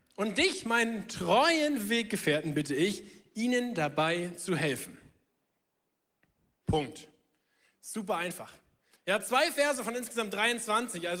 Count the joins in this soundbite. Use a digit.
2